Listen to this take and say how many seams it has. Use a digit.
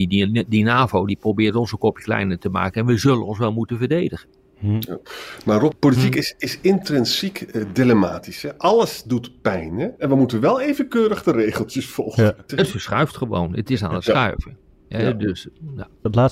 2